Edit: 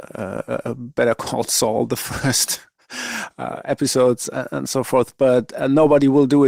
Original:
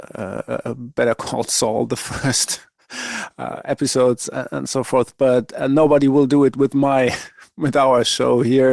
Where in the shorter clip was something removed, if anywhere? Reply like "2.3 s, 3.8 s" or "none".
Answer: none